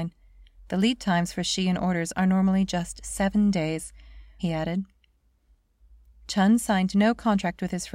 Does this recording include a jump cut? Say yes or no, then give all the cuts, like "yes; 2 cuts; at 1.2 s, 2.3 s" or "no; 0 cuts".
yes; 1 cut; at 4.4 s